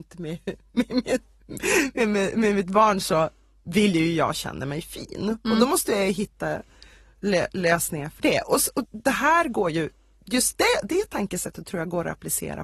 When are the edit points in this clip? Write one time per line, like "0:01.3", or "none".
0:08.8